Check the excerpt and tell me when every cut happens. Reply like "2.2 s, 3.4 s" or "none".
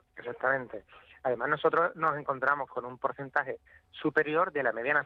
none